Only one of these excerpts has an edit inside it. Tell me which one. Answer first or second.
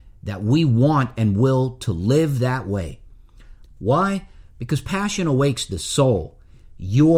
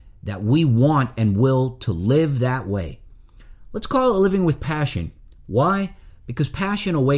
first